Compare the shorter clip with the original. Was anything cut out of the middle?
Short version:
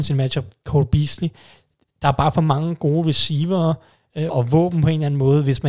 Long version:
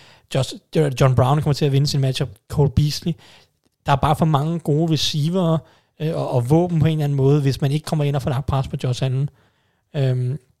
yes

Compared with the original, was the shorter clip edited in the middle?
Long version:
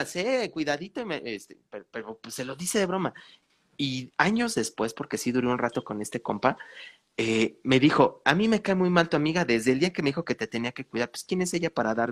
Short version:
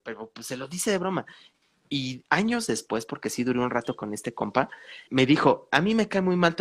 yes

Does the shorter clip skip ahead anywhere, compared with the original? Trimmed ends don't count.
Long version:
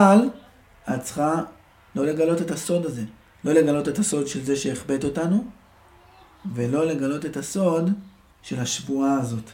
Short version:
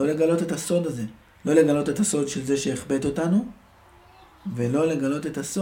no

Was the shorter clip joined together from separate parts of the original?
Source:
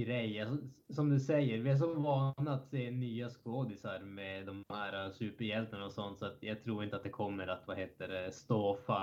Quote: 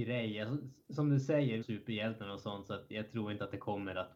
yes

